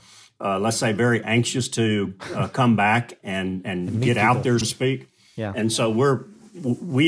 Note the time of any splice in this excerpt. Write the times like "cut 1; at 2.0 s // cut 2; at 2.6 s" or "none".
cut 1; at 4.6 s